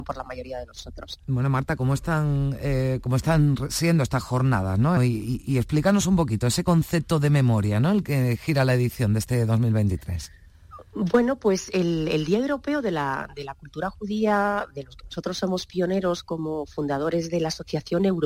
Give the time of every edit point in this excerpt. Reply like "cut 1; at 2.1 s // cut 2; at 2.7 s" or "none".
cut 1; at 5.0 s